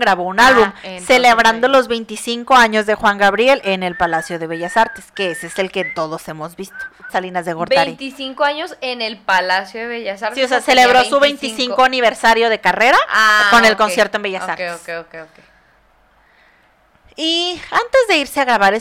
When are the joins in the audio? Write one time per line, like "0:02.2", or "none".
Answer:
0:07.1